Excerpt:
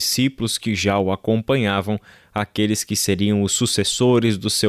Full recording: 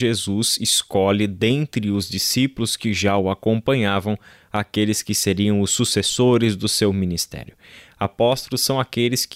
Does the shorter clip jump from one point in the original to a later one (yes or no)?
no